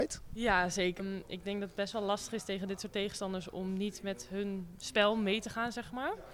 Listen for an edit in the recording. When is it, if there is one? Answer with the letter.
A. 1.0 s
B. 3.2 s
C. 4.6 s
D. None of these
A